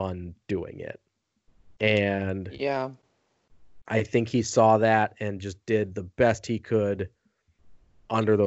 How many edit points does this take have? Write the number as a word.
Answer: zero